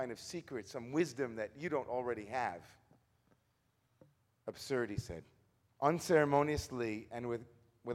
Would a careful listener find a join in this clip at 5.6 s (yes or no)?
yes